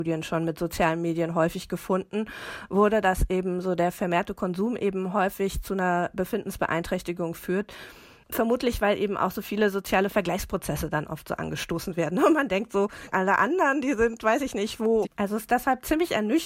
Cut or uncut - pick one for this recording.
cut